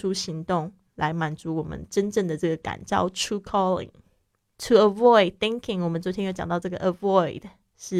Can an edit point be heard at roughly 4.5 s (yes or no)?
yes